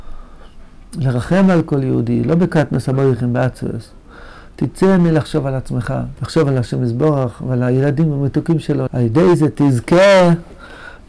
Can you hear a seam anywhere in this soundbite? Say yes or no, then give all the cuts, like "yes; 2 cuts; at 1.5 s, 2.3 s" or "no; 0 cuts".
yes; 2 cuts; at 6.1 s, 8.9 s